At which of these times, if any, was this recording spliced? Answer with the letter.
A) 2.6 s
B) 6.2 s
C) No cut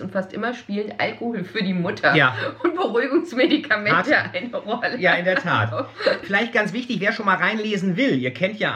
B